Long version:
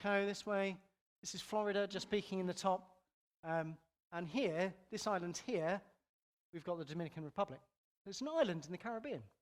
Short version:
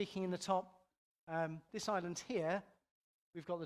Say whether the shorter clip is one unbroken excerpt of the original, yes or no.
no